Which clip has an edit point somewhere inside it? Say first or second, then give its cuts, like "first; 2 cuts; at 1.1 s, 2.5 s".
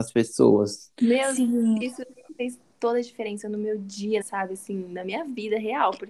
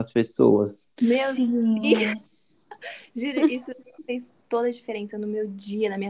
first; 2 cuts; at 1.8 s, 4.2 s